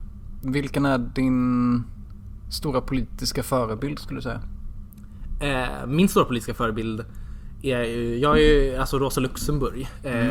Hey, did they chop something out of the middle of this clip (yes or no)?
no